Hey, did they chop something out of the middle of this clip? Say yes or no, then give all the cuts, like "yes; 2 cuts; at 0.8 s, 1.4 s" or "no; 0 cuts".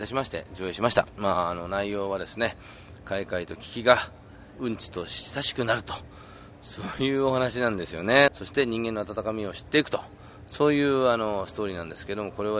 yes; 1 cut; at 8.3 s